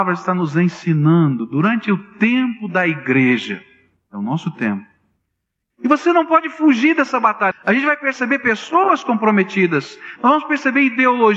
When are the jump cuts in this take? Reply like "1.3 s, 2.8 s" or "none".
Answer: 5.7 s, 7.5 s, 10.2 s